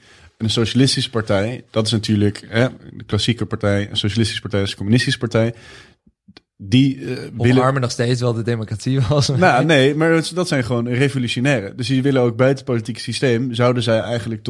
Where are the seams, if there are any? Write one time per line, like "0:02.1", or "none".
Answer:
none